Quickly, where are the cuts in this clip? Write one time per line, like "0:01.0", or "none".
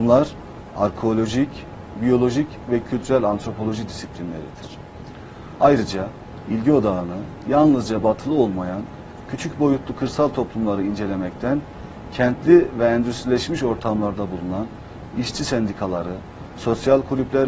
0:01.9
0:05.6